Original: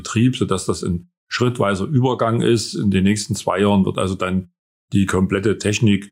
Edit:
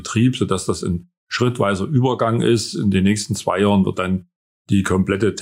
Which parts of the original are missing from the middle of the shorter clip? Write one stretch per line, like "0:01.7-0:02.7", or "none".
0:03.9-0:04.2